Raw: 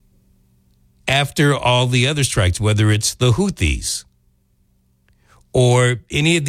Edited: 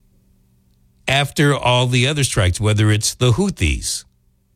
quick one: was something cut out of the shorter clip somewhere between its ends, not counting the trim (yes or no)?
no